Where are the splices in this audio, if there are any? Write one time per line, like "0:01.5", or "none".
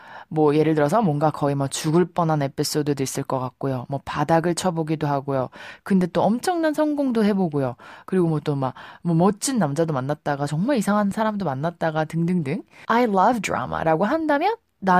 0:12.8